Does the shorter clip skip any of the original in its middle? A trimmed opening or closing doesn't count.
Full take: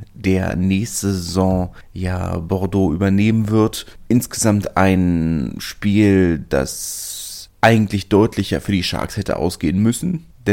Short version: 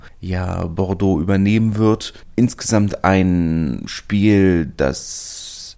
no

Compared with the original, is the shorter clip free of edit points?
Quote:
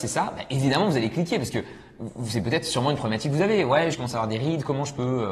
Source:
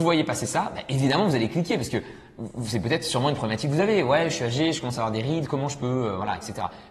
no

